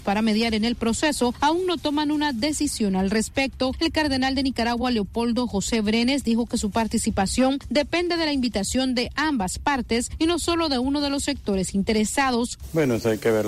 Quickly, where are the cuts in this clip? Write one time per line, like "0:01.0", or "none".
none

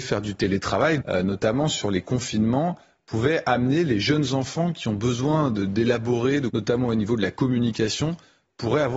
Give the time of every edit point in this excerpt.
0:01.0
0:06.5

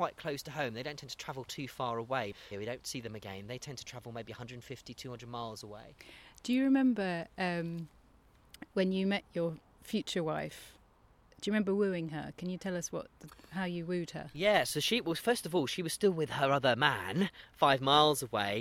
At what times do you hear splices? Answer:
0:02.5

